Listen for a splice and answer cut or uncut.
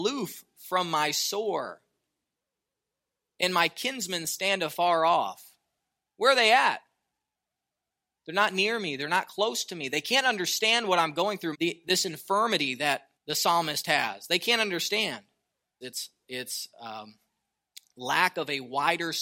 cut